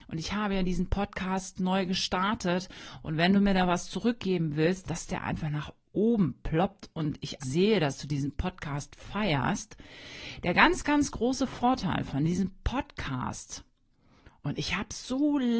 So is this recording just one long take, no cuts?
no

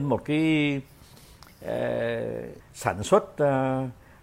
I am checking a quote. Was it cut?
yes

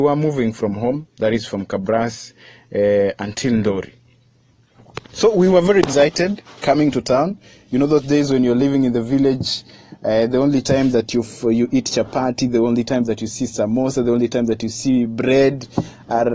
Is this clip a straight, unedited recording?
yes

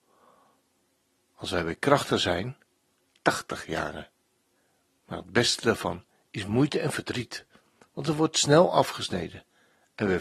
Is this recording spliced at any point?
no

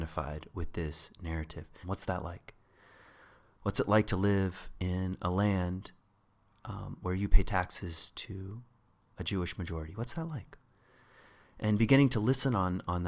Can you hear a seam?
yes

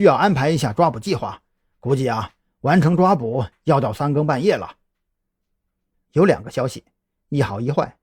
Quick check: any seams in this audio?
yes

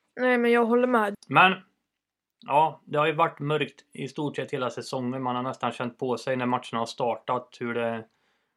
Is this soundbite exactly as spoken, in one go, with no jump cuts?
no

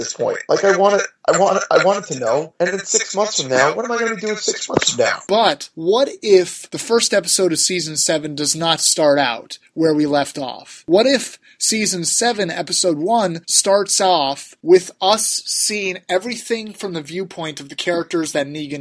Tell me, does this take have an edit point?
yes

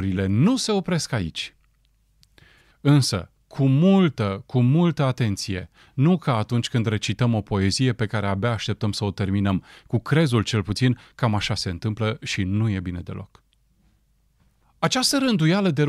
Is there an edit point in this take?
yes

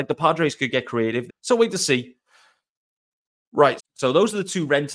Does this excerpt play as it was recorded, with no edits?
no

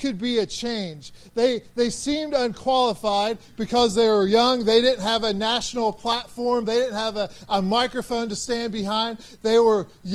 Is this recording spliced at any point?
no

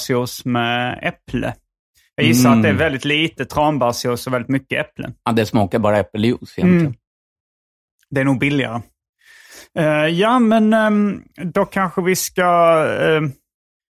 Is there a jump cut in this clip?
no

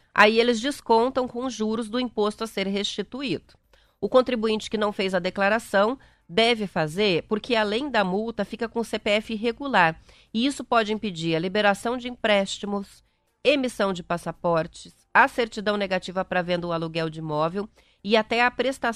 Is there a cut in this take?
no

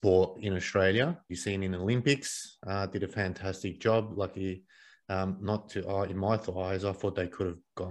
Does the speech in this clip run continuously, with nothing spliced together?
no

